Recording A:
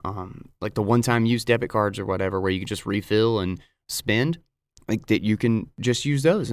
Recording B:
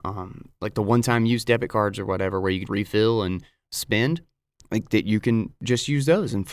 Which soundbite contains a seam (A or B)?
B